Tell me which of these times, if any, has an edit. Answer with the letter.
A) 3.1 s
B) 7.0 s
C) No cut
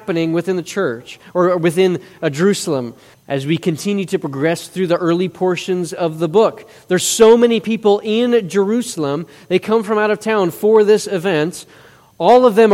A